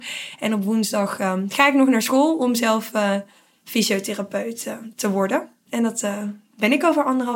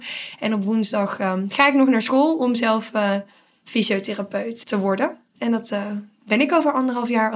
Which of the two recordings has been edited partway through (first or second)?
second